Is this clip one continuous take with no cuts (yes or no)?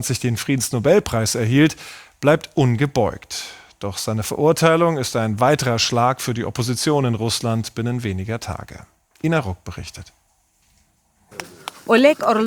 yes